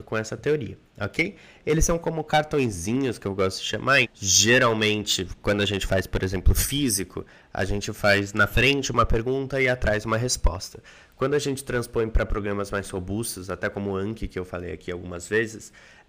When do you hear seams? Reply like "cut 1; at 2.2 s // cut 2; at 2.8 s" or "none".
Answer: cut 1; at 4.0 s